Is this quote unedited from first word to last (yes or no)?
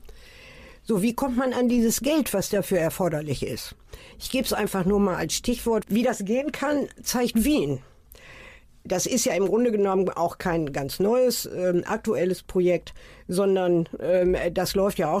no